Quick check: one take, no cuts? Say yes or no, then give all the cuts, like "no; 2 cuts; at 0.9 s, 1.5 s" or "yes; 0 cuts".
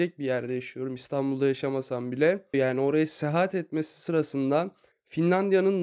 no; 1 cut; at 2.5 s